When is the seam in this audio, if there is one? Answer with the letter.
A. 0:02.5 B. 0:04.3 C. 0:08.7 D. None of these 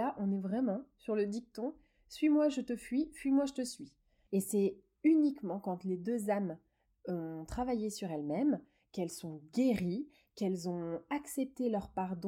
B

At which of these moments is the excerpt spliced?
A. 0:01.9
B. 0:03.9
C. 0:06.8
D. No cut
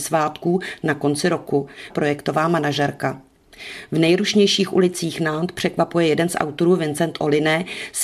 A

